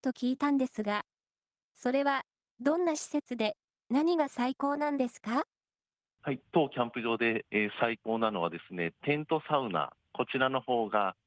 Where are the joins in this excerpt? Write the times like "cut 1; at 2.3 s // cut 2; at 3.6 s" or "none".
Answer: none